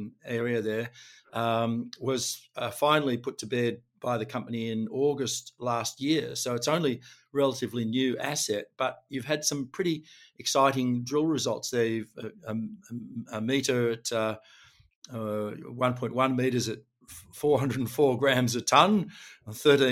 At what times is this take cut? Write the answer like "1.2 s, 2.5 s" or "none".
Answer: none